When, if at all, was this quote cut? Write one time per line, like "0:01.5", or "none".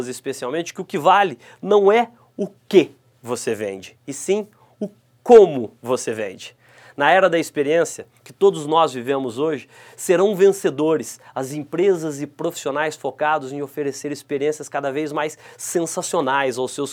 none